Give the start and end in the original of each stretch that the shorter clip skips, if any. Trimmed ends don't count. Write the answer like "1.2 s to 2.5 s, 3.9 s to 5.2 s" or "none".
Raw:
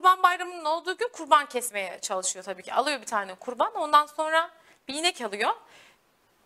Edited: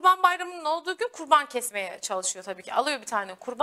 none